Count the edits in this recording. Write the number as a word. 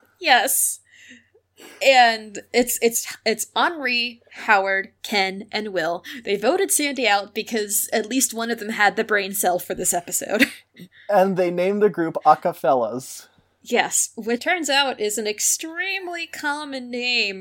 one